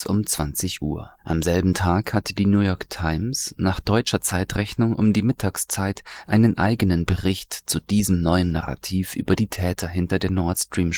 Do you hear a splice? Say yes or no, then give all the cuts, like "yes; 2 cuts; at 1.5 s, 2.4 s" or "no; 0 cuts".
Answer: yes; 1 cut; at 1.2 s